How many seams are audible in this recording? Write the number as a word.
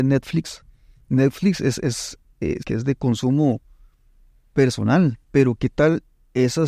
two